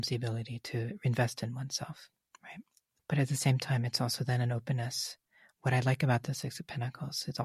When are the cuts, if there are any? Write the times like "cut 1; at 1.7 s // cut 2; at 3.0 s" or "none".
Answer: none